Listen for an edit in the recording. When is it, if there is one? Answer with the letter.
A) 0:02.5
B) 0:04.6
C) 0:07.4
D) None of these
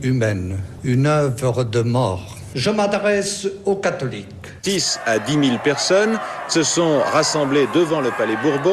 B